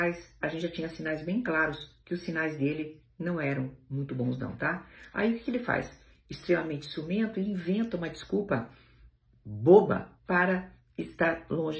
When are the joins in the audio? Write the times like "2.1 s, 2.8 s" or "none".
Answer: 10.2 s